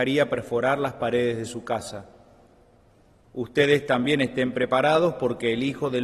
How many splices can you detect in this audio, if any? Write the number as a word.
zero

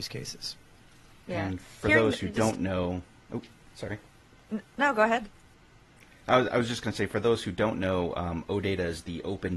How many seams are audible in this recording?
zero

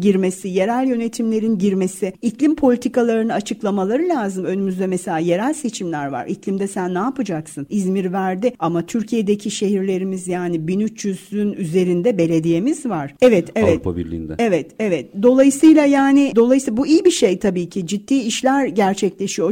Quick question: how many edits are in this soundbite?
two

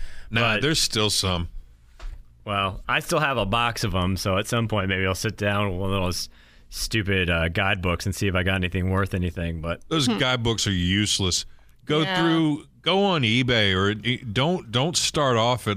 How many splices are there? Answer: zero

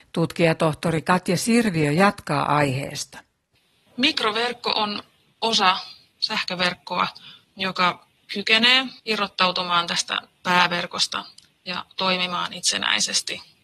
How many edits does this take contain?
two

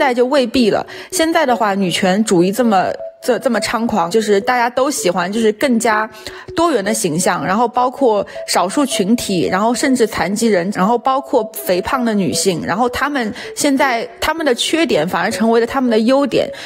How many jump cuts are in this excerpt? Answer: two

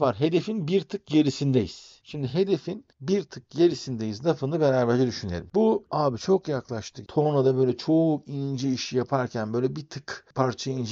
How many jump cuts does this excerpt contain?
one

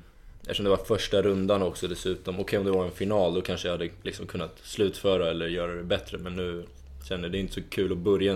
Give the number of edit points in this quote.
zero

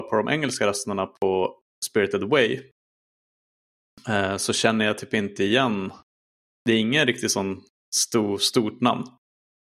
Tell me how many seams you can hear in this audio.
zero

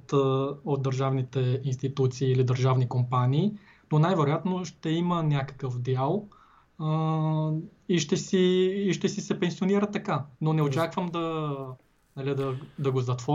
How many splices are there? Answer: one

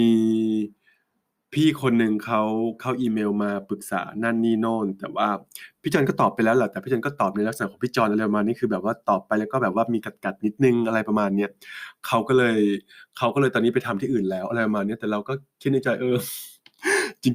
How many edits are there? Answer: zero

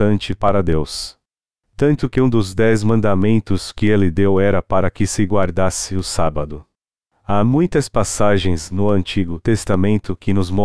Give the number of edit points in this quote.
zero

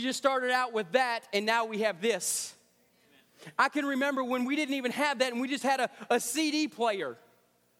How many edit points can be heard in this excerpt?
zero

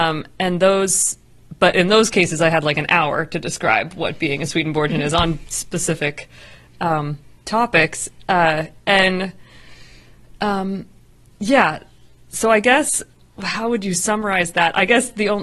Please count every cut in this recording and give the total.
zero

